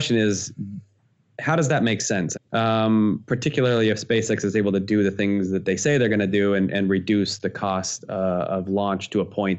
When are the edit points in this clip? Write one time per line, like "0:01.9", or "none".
0:02.3